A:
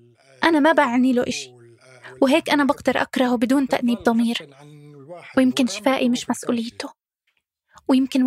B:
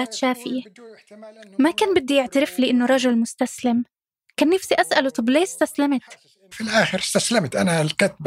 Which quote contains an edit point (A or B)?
B